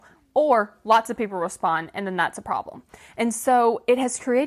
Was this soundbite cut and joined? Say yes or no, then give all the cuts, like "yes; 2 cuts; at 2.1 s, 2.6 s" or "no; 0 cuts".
no; 0 cuts